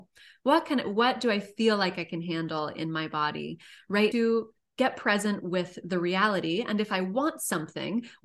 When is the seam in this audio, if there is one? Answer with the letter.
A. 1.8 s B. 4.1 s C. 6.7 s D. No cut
B